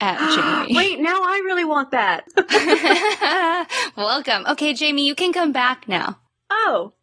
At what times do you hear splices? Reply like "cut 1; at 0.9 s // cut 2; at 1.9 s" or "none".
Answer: none